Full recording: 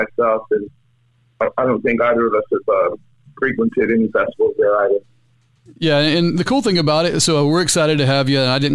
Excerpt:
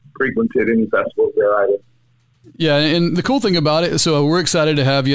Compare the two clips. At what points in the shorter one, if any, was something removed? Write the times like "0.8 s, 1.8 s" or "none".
none